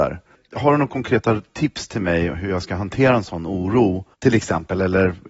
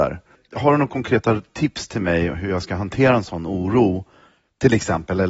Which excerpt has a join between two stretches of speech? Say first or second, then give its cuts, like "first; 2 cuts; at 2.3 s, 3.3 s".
first; 1 cut; at 4.1 s